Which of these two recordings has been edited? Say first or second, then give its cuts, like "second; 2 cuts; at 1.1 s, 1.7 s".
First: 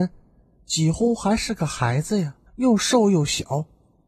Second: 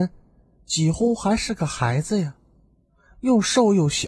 first; 1 cut; at 2.5 s